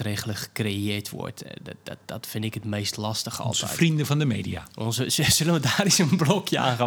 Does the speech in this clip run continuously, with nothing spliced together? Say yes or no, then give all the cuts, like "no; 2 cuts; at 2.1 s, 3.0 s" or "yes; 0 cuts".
yes; 0 cuts